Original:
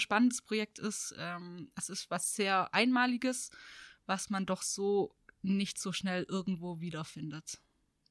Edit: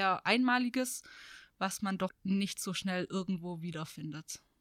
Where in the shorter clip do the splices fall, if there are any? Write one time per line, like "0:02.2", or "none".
0:02.1